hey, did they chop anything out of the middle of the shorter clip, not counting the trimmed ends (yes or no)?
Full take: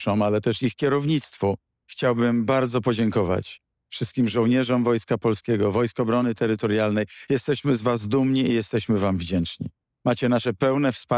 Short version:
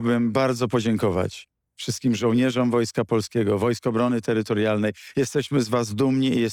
no